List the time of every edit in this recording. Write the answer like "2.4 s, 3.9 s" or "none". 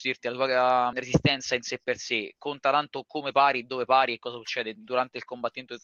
0.9 s